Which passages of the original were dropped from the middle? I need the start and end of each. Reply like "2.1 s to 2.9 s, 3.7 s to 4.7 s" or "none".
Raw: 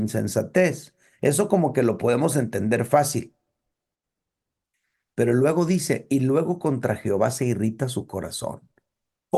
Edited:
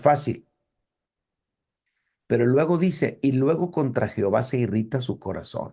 none